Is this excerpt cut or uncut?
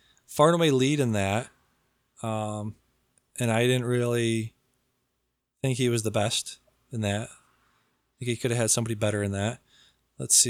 uncut